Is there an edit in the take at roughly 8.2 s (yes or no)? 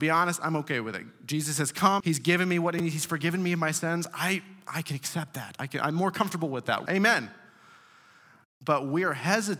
no